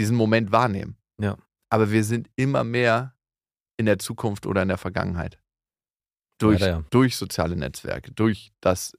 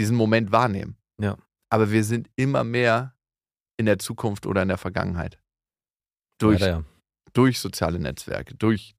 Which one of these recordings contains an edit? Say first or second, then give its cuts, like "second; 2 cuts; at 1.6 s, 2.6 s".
first; 1 cut; at 6.9 s